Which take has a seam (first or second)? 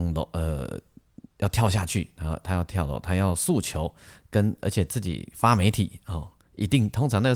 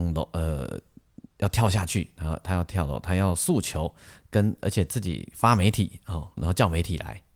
second